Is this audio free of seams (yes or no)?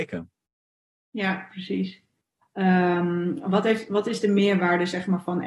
no